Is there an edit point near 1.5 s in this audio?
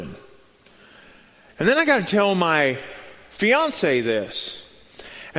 yes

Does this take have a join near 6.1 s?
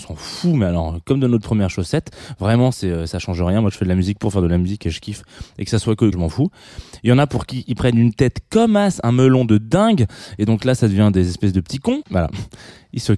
yes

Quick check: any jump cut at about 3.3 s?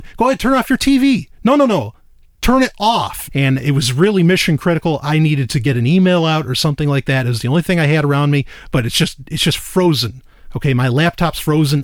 yes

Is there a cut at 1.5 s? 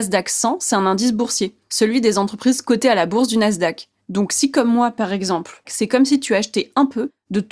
no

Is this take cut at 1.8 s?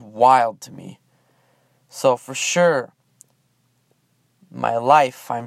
no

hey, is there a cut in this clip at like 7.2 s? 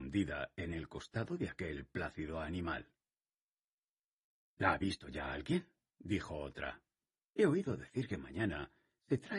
yes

